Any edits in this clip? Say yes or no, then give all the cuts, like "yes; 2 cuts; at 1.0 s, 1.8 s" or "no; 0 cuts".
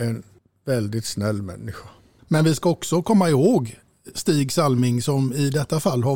yes; 1 cut; at 2.2 s